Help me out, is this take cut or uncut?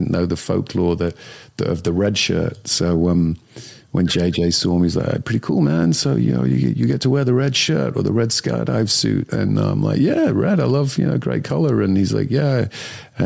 uncut